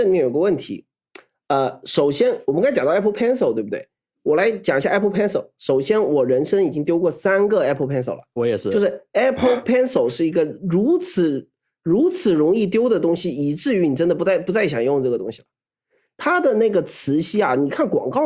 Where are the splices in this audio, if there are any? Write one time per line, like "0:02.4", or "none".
none